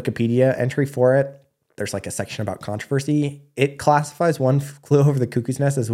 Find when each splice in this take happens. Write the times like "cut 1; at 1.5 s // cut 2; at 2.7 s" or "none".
cut 1; at 1.8 s